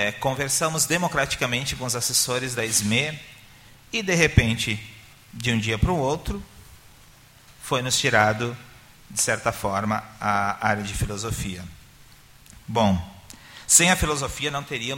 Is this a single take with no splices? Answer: yes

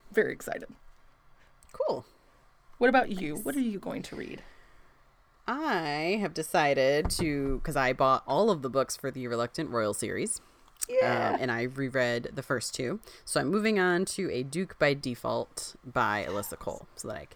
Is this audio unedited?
yes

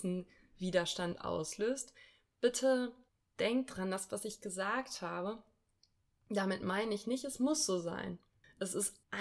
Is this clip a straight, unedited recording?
yes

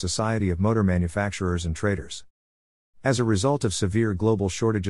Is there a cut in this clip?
no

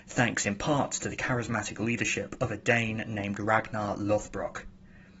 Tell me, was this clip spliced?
no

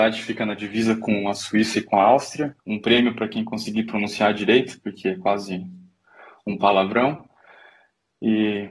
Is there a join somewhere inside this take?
yes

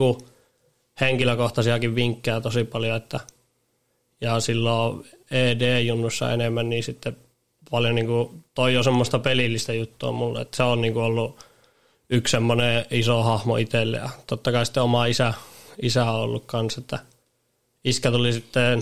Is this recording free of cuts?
yes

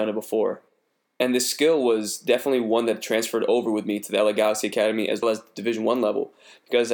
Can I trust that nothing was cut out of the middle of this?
no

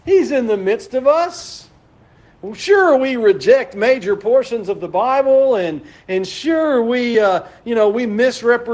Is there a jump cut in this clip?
no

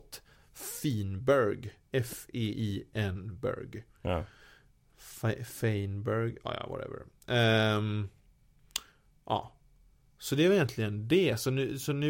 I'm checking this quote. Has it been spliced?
no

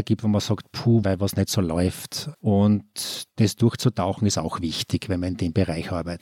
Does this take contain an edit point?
yes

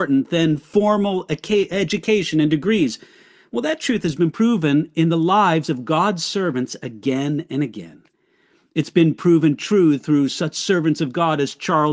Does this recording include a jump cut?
no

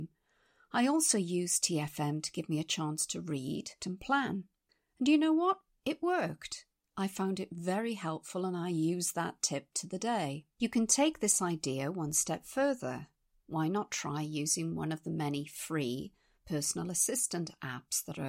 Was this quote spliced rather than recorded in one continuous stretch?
yes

